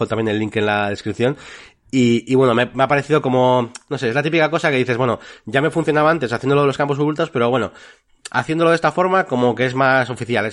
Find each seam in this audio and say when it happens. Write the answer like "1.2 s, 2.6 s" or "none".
none